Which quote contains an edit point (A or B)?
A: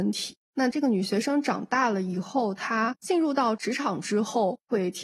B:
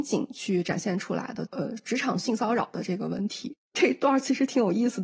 B